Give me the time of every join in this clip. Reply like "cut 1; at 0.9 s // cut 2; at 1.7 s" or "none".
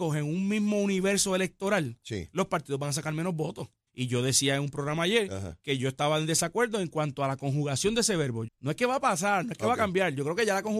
cut 1; at 3.9 s // cut 2; at 8.5 s